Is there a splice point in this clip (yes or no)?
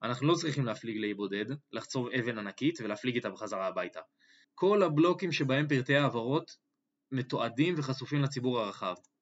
yes